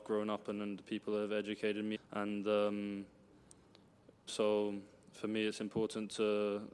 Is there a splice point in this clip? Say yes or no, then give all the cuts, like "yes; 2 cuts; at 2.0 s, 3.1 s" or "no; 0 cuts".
yes; 2 cuts; at 1.9 s, 4.3 s